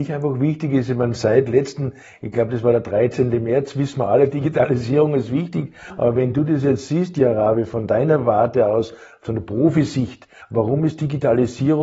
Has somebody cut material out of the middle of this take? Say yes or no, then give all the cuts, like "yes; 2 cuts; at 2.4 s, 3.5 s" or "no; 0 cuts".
no; 0 cuts